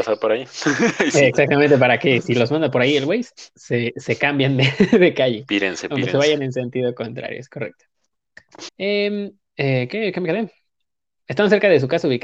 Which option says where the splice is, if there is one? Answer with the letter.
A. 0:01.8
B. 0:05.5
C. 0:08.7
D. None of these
C